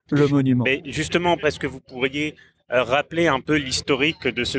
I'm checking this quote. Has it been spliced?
yes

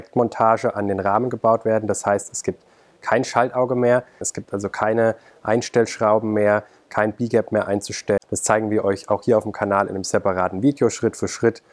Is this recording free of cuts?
no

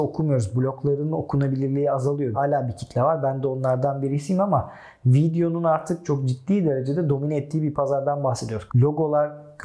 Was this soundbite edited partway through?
yes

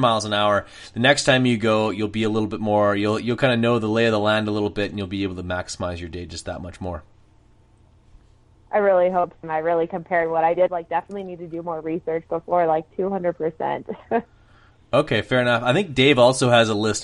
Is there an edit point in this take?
yes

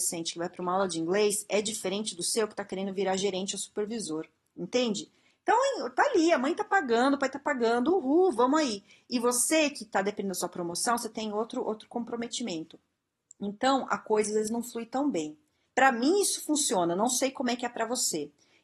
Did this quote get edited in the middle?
yes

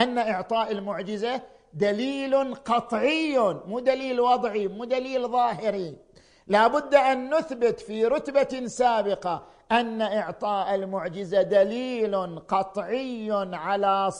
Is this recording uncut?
yes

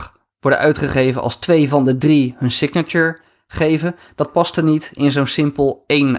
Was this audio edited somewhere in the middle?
no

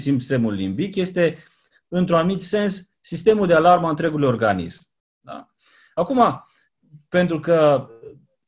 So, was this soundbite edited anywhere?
yes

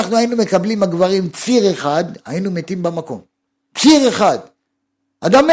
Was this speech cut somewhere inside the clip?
no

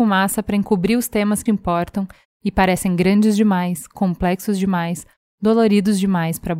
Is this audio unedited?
no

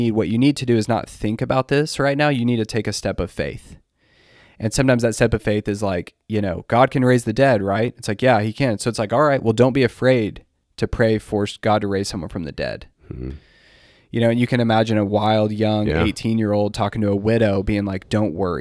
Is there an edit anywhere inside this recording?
no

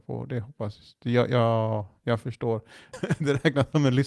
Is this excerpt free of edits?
no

